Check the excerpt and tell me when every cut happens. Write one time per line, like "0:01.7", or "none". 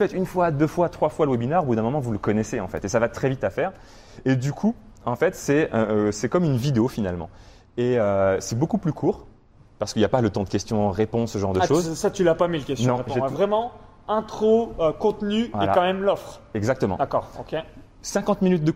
none